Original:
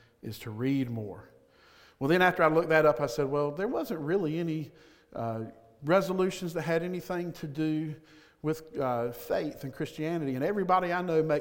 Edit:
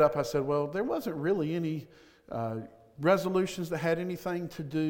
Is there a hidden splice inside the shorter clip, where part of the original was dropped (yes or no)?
no